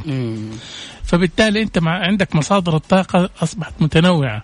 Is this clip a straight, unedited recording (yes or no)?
no